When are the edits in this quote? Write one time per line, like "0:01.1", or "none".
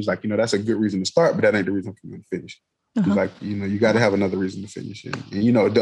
none